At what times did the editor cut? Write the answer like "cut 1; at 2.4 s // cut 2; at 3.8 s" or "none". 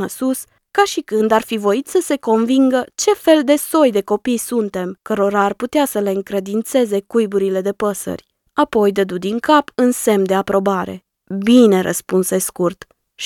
none

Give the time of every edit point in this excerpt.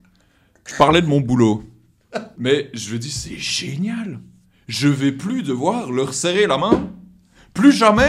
cut 1; at 2.3 s

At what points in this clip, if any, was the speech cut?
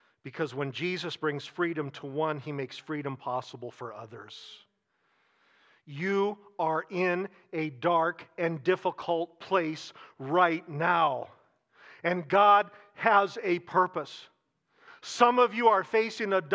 cut 1; at 14.9 s

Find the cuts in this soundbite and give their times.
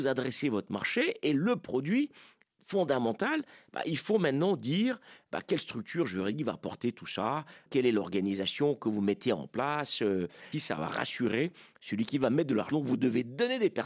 cut 1; at 10.5 s // cut 2; at 12.7 s

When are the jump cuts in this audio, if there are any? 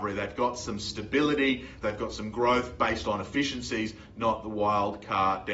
cut 1; at 1.8 s

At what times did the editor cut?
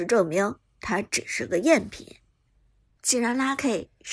cut 1; at 2.8 s

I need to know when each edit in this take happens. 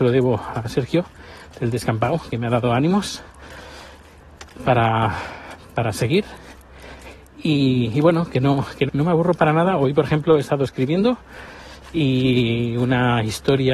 cut 1; at 8.9 s

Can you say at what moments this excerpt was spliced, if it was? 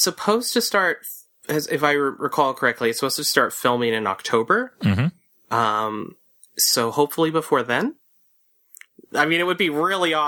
none

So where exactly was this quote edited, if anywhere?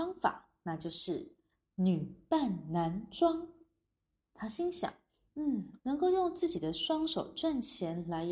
cut 1; at 5.8 s

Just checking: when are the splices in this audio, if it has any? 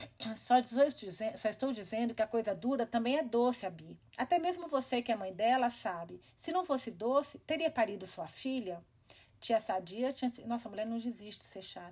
none

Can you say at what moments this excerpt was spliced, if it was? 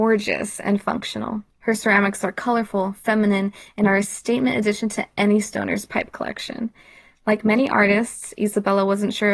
cut 1; at 1.5 s

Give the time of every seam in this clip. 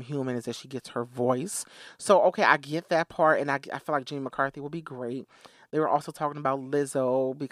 none

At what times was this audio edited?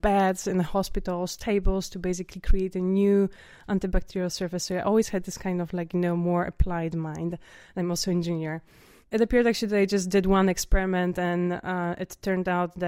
none

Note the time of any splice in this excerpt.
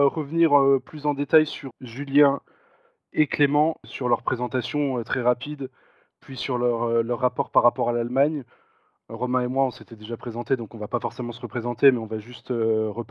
none

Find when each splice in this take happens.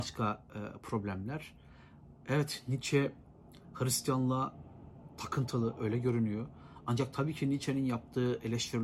none

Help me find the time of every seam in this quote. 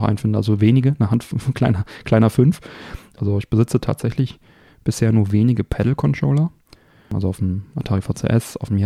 cut 1; at 3.2 s

